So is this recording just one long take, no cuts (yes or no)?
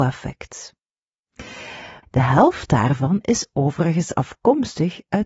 no